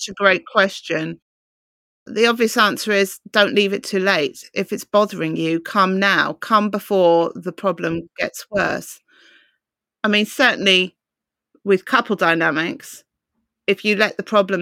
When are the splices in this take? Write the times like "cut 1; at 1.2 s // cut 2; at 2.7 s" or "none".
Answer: none